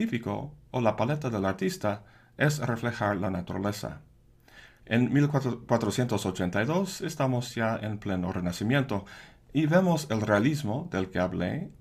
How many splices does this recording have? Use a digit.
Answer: 1